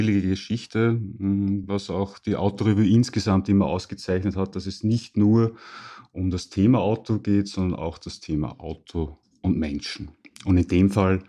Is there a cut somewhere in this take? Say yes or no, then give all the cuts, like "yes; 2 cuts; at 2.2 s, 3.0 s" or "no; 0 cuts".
no; 0 cuts